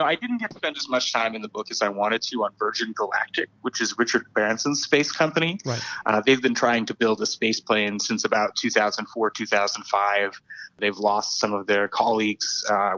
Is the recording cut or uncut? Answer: uncut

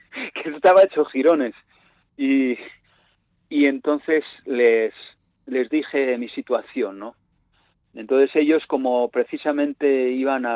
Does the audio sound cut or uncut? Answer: uncut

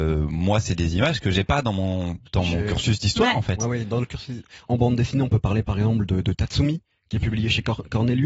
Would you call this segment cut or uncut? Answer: cut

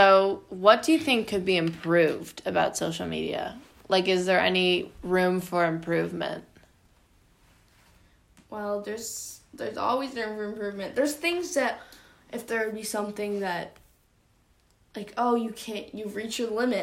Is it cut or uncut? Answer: uncut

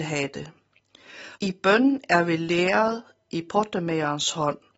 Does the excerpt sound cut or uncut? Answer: cut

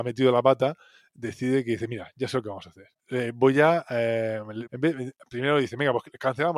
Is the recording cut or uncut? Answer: cut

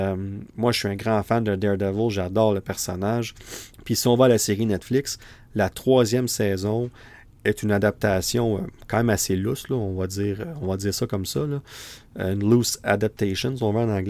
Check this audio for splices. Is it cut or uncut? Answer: cut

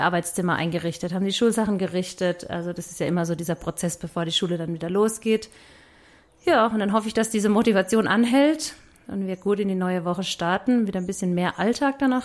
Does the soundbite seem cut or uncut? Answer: uncut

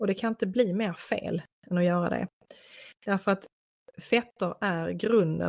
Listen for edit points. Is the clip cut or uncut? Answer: uncut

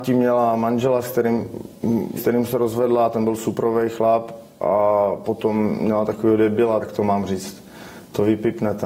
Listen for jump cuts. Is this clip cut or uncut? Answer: cut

